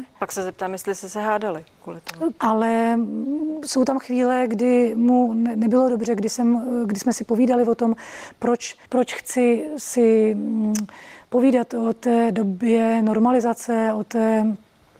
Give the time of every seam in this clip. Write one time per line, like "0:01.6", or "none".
0:02.4
0:08.9